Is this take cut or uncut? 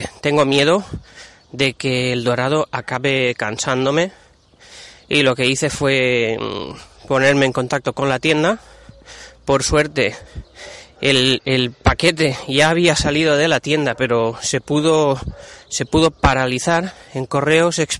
uncut